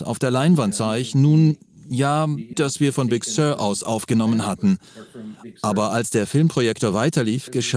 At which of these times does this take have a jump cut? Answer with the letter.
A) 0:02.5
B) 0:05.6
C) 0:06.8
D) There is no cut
A